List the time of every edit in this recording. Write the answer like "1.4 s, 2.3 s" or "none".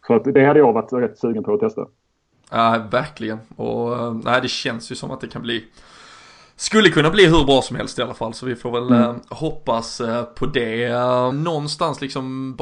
11.3 s